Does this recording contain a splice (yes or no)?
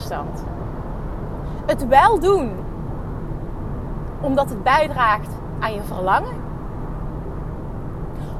no